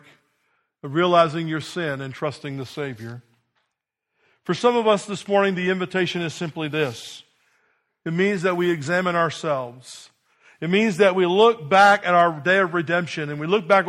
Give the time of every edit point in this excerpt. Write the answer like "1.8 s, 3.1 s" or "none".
none